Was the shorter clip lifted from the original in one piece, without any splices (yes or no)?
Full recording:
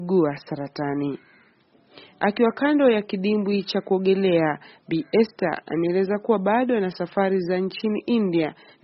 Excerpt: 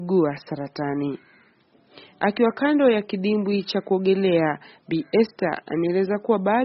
yes